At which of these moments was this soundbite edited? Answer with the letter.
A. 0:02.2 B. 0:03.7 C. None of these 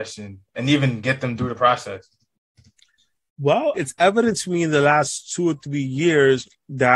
B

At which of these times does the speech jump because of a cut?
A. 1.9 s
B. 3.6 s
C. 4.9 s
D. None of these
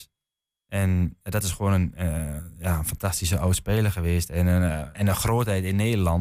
C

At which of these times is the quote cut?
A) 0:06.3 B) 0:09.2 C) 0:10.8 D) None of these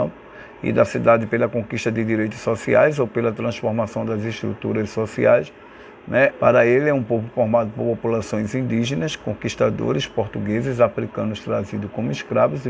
A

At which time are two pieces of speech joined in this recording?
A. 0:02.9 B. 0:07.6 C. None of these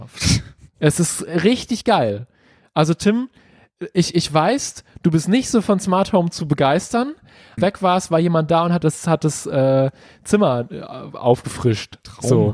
B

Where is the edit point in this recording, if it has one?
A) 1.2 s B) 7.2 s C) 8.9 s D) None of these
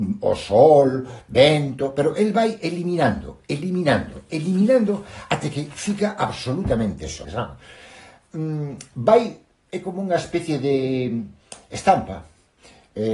B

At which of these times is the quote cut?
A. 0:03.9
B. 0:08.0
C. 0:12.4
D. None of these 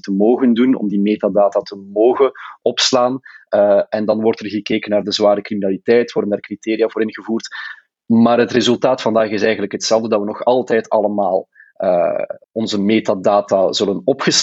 C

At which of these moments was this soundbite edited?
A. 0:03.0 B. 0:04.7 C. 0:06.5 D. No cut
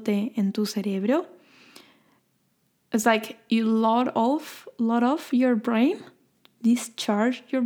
D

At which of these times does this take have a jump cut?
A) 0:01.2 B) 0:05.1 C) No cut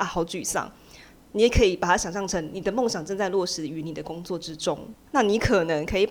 B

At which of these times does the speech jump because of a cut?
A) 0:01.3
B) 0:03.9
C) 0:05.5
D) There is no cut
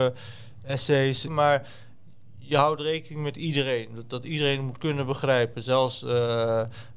A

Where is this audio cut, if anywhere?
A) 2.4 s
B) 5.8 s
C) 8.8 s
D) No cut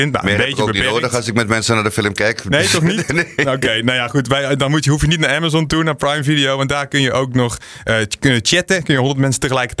D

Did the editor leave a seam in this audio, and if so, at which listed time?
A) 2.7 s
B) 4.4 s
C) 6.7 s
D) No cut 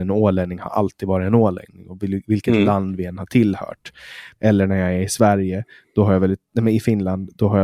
B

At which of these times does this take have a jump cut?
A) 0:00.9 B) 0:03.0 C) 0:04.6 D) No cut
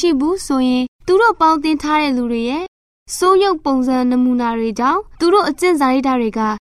A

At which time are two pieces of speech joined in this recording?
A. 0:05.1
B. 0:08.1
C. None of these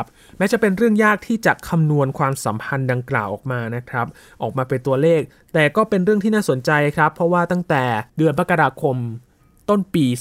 B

